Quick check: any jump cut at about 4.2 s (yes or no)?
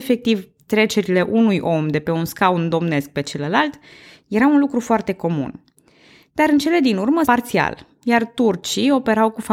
no